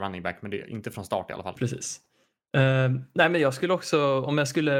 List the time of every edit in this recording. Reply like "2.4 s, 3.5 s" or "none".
1.6 s